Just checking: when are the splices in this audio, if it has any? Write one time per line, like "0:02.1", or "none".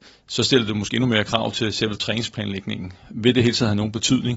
0:03.0